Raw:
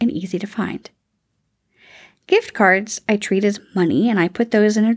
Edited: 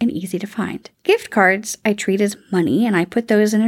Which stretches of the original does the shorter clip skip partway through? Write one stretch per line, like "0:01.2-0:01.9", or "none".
0:00.9-0:02.2